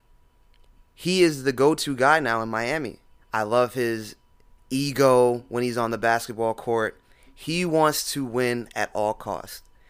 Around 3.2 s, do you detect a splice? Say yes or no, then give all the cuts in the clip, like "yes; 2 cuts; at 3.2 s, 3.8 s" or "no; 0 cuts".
yes; 1 cut; at 3.2 s